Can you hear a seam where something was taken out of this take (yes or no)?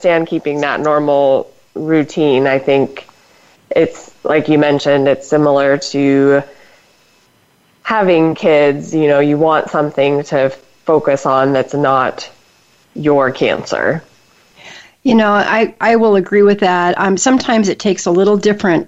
no